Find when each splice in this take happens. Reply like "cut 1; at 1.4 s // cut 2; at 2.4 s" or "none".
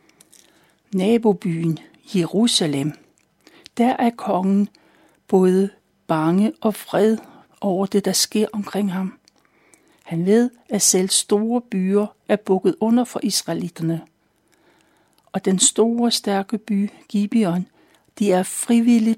none